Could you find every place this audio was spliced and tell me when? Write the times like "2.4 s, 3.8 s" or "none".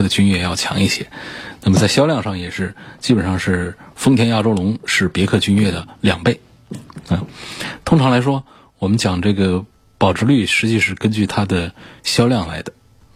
none

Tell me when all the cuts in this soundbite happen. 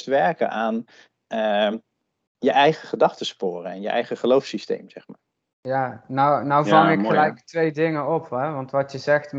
none

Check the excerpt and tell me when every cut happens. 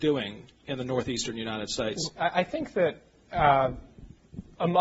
2.1 s

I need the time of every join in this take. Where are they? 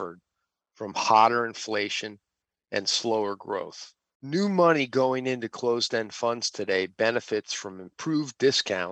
4.2 s

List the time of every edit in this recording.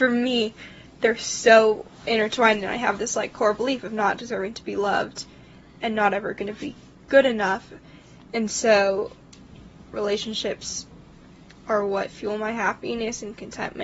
9.9 s

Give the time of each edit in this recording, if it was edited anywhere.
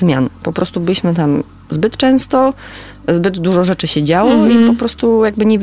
none

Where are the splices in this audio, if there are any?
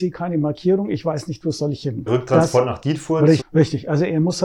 2.1 s, 3.4 s

